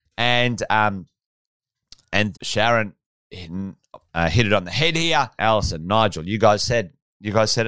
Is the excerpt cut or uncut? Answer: cut